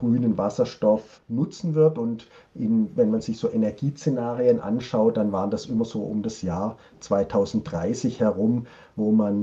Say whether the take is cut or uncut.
uncut